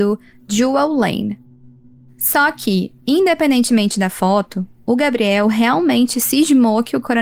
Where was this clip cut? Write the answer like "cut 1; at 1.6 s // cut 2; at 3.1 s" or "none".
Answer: none